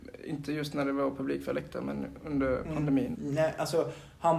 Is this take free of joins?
no; 1 cut; at 3.1 s

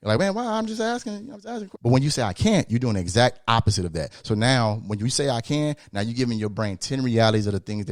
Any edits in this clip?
yes; 1 cut; at 1.7 s

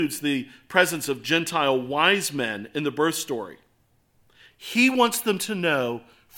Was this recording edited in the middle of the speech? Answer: yes; 1 cut; at 4.5 s

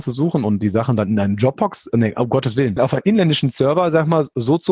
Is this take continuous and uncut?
no; 1 cut; at 2.8 s

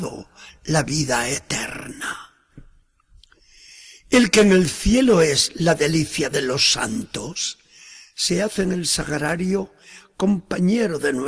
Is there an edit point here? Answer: no; 0 cuts

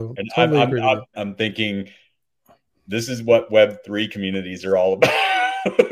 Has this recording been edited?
yes; 1 cut; at 1.1 s

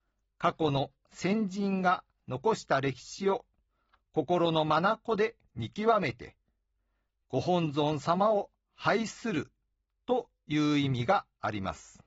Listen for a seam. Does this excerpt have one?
no; 0 cuts

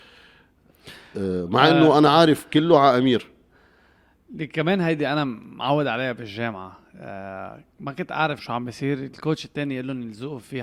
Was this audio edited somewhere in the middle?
yes; 1 cut; at 8.4 s

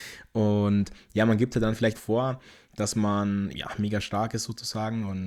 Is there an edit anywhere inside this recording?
yes; 2 cuts; at 1.9 s, 3.5 s

